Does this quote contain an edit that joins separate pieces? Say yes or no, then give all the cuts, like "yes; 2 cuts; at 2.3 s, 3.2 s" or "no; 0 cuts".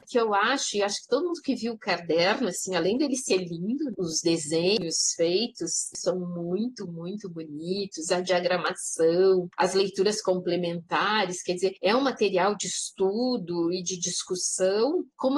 yes; 1 cut; at 3.9 s